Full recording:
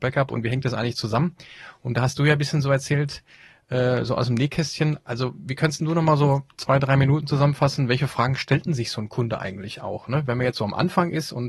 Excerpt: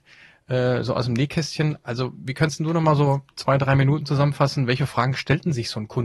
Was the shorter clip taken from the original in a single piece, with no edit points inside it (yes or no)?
yes